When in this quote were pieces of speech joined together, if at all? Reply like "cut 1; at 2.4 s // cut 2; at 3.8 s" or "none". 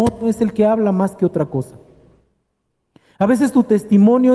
none